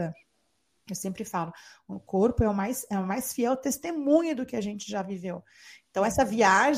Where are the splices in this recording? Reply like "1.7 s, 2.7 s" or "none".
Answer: none